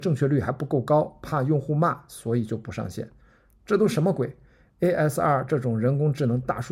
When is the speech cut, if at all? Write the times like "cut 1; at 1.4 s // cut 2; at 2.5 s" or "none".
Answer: none